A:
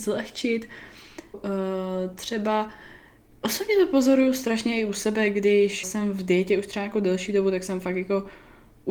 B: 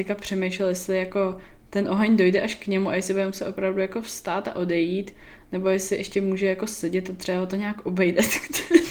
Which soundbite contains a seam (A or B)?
A